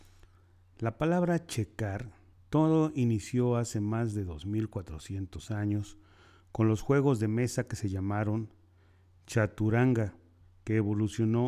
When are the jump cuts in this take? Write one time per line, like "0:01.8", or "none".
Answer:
0:02.3